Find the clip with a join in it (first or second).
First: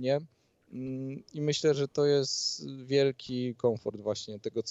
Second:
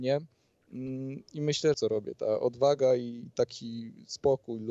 second